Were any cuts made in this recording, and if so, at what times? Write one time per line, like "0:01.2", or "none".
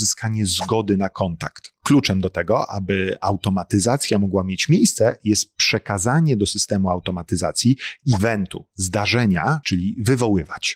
0:09.6